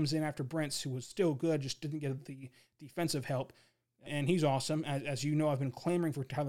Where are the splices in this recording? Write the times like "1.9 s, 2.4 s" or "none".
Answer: 4.1 s